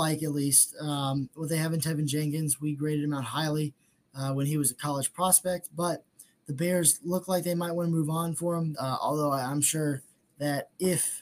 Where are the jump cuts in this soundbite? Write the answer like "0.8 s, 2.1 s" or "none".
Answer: 8.7 s